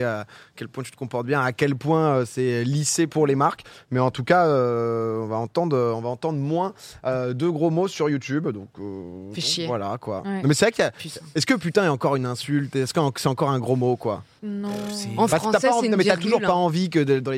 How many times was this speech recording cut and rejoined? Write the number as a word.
one